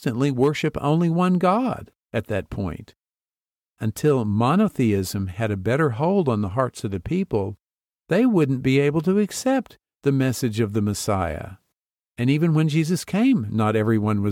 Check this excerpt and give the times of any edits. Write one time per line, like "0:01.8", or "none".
none